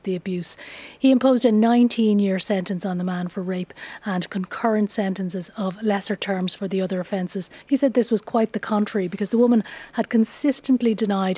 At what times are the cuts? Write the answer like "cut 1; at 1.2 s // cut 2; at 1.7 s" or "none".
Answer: cut 1; at 7.6 s